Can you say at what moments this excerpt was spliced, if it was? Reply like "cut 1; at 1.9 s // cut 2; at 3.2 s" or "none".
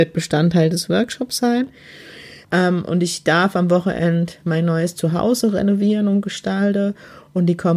cut 1; at 2.4 s